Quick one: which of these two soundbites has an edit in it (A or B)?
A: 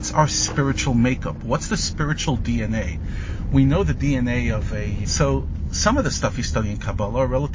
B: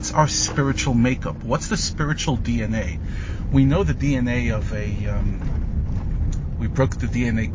A